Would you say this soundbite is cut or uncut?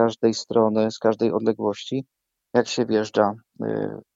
uncut